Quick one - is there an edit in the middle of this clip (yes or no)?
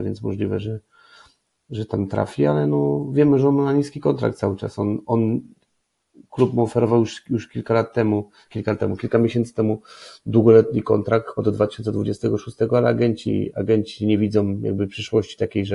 no